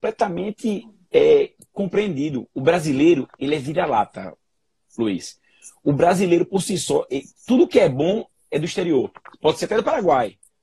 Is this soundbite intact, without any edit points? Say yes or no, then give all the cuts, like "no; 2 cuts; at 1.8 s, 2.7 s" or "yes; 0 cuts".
yes; 0 cuts